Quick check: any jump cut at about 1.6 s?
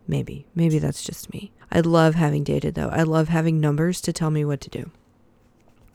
yes; 1 cut; at 1.6 s

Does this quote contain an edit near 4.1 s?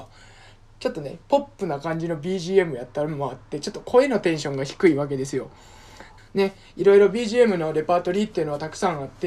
no; 1 cut; at 6.2 s

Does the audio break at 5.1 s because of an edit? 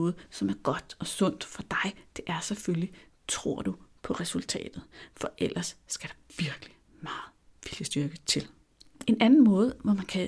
no; 1 cut; at 9.1 s

